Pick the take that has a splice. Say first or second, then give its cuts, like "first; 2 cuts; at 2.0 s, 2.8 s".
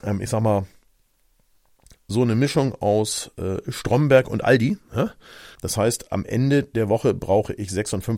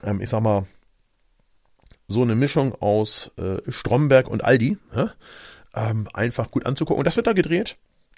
first; 1 cut; at 5.6 s